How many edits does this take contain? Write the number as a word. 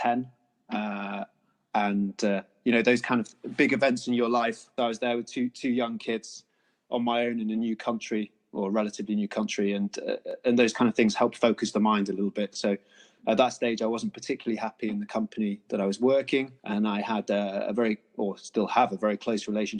two